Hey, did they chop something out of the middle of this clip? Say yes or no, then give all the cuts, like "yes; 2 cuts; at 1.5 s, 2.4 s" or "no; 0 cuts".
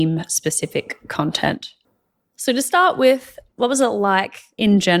no; 0 cuts